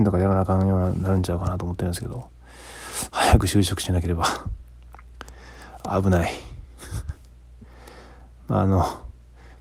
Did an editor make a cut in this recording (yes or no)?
no